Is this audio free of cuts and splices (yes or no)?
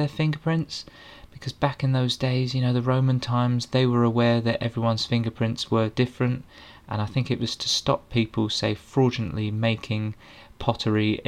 yes